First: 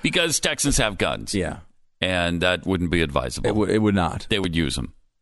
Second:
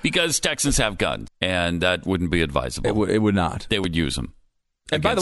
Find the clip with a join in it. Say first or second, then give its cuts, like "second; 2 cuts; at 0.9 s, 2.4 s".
second; 1 cut; at 1.3 s